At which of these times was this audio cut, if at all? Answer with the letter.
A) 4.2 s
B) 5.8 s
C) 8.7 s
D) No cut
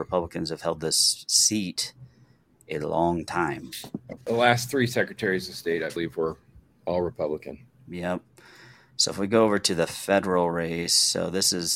A